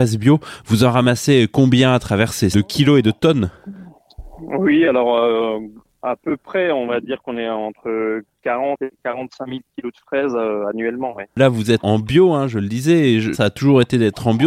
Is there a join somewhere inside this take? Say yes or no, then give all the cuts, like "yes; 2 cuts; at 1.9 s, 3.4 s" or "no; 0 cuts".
yes; 3 cuts; at 2.5 s, 11.8 s, 13.3 s